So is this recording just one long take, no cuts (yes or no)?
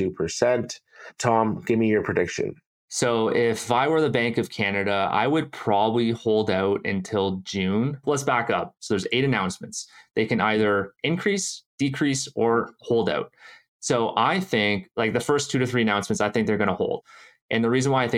no